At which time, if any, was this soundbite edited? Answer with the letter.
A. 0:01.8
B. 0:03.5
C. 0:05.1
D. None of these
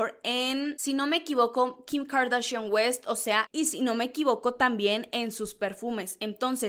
B